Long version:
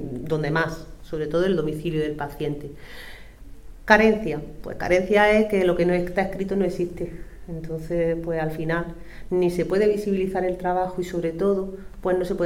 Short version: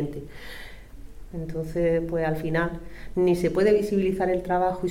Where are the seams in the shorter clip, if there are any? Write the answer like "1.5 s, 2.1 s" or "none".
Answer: 1.3 s